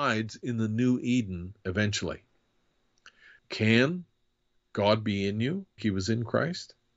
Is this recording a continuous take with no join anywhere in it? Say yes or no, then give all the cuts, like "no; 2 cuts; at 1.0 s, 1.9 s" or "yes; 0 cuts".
no; 2 cuts; at 3.4 s, 5.8 s